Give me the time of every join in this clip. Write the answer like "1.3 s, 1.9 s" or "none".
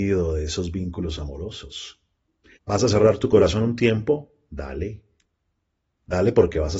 2.6 s